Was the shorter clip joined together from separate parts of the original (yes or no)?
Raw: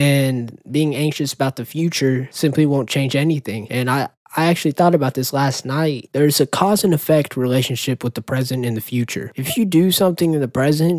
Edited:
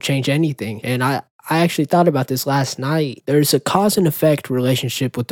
no